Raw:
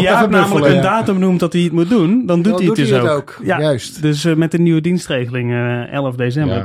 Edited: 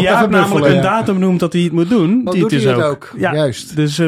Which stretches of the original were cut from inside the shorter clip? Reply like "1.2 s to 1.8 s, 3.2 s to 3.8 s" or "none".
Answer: 2.3 s to 2.5 s